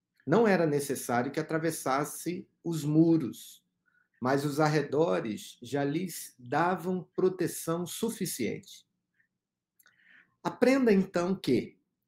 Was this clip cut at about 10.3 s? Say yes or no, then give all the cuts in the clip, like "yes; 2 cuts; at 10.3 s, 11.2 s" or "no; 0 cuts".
no; 0 cuts